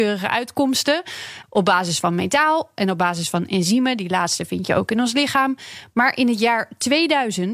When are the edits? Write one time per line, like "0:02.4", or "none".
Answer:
0:01.4